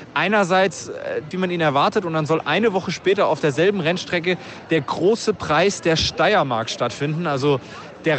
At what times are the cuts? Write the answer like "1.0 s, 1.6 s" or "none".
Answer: 1.3 s